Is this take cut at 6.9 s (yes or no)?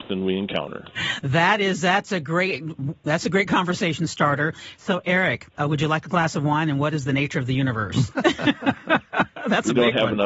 no